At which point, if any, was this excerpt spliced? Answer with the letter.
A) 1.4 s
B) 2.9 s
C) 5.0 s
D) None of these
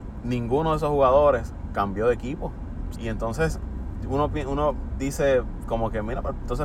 B